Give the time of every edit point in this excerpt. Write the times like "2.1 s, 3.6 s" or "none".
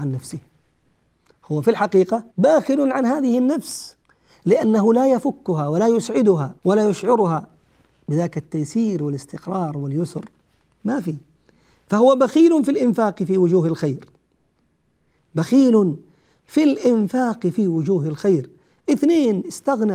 2.3 s, 6.6 s